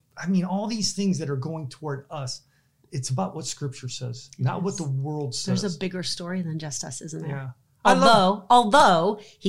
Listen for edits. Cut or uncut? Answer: uncut